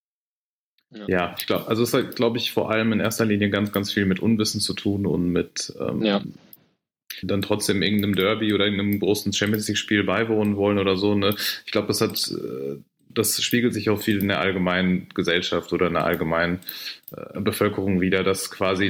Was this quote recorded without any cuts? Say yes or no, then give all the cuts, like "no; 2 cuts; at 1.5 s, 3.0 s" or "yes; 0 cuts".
no; 1 cut; at 7.2 s